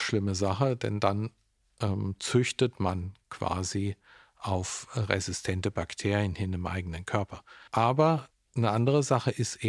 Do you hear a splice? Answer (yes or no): yes